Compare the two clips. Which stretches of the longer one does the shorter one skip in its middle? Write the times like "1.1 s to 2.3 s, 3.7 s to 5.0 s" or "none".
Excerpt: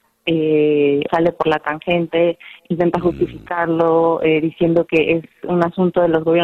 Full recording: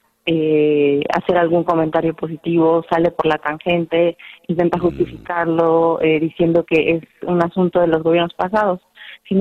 1.1 s to 2.9 s